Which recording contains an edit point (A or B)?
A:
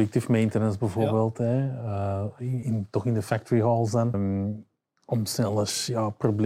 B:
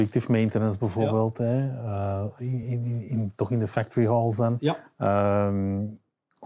A